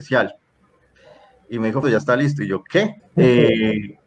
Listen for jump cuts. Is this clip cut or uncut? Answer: cut